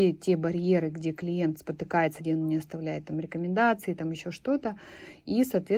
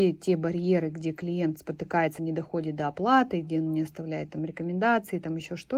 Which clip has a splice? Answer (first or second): first